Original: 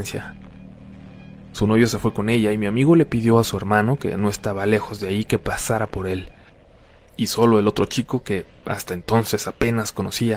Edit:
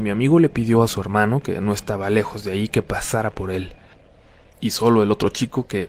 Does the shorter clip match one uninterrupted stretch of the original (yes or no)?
yes